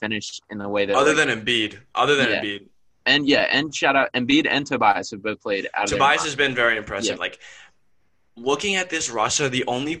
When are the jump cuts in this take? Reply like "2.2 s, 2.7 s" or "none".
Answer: 7.2 s